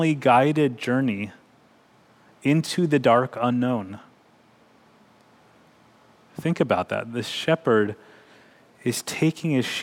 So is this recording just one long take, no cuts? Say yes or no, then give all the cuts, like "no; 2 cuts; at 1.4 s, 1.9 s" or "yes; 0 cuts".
yes; 0 cuts